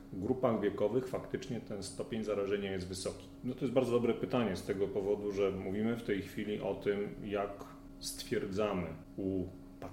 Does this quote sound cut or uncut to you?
cut